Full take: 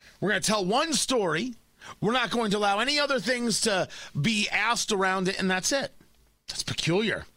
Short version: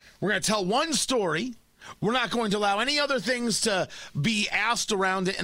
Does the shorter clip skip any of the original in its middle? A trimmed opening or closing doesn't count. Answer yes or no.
no